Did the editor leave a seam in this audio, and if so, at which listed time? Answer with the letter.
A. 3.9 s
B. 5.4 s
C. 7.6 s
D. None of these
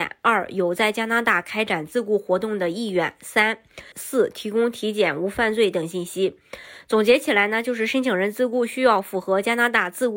A